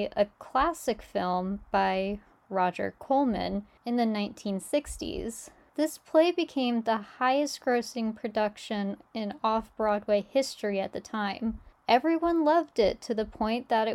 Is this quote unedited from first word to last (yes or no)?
yes